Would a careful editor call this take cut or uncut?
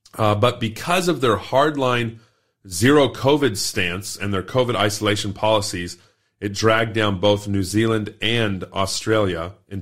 uncut